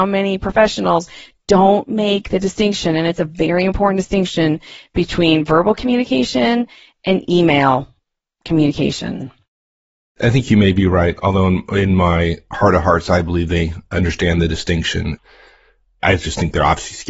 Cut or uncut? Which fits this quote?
uncut